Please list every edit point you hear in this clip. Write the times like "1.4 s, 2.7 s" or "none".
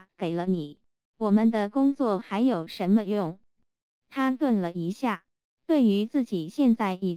3.6 s